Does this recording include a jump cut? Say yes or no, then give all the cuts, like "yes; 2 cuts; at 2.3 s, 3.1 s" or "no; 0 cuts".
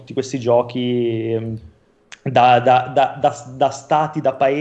no; 0 cuts